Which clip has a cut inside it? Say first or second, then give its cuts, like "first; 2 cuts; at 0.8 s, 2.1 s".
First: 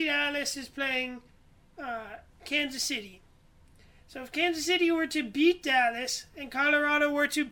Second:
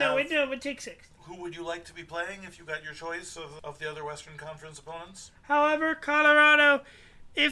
second; 2 cuts; at 3.6 s, 5.4 s